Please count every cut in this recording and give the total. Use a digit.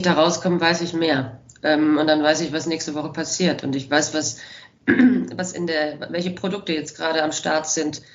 0